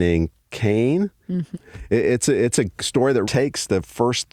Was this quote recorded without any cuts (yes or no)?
no